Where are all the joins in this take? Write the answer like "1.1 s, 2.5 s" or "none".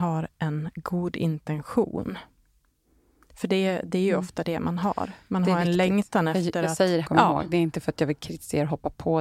7.0 s